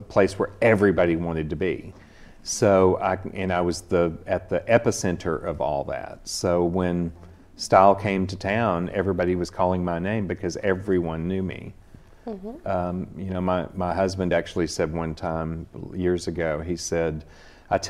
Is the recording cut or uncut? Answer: uncut